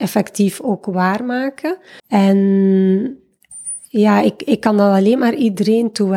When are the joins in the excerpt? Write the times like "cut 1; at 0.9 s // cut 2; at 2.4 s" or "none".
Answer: cut 1; at 2.0 s